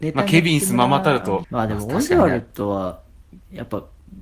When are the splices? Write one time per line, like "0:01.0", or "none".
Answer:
0:01.4